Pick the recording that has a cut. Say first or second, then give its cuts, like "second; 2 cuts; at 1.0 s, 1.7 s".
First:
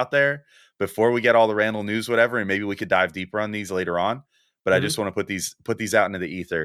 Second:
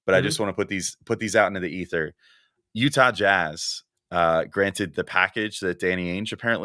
second; 2 cuts; at 3.9 s, 4.9 s